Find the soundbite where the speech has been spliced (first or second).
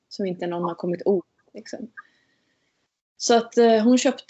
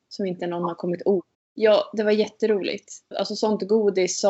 second